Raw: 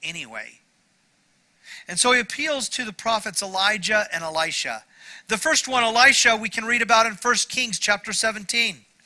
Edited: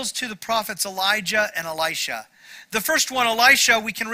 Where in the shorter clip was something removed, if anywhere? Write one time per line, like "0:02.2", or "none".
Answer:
none